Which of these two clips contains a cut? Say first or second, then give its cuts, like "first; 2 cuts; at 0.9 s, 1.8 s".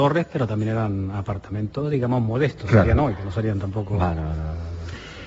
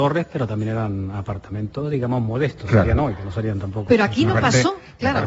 second; 1 cut; at 3.9 s